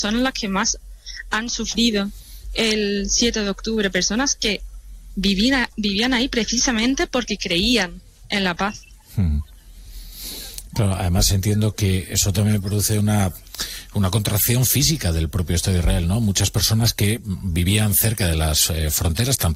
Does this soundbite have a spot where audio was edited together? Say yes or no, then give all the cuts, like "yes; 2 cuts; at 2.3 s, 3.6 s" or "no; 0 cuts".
no; 0 cuts